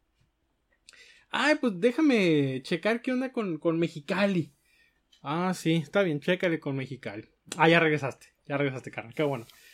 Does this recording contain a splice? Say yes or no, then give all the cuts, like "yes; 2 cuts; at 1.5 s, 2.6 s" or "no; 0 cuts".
no; 0 cuts